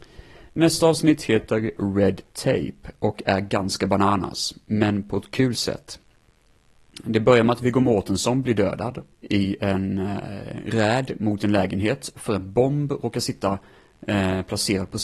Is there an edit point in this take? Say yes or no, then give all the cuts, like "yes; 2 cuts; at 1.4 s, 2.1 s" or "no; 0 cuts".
yes; 1 cut; at 9.1 s